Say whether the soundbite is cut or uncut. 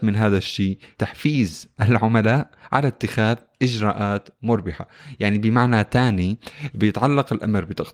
cut